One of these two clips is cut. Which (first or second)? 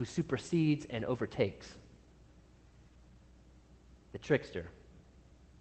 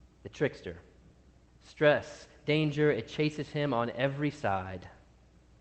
second